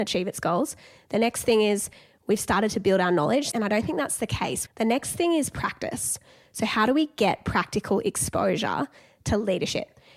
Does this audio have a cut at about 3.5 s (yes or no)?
yes